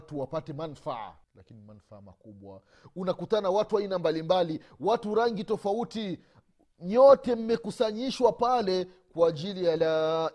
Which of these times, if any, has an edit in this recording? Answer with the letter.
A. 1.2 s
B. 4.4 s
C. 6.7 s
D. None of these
A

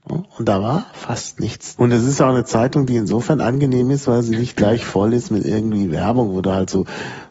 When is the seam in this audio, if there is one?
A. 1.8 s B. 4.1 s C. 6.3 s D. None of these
A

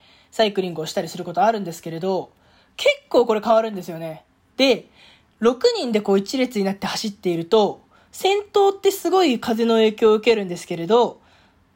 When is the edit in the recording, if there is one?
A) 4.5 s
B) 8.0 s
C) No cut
A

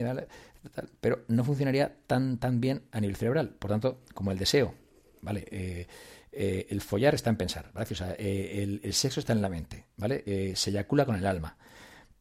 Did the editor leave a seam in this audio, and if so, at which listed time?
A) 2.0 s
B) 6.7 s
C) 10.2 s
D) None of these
D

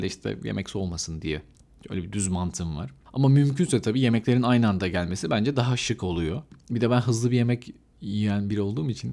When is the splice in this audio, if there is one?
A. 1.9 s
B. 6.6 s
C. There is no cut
C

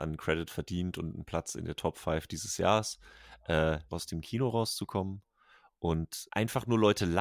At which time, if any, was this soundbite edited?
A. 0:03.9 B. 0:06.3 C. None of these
A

